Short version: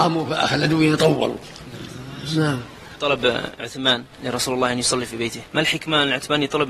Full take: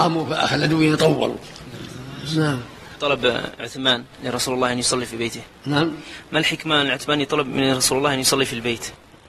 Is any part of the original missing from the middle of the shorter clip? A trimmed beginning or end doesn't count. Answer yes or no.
yes